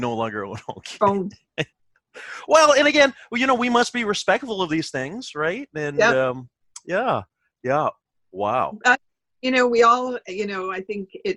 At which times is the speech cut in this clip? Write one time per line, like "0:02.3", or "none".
0:01.7